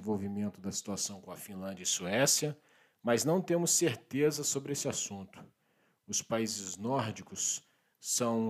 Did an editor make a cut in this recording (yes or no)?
no